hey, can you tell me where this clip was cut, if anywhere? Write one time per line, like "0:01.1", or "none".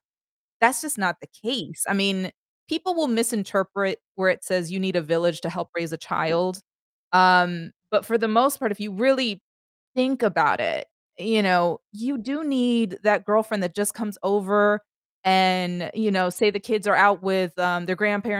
none

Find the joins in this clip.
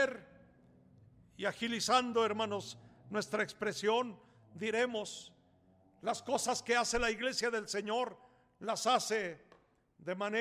none

